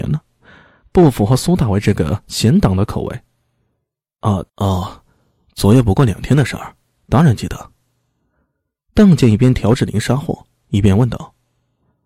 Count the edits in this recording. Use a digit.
1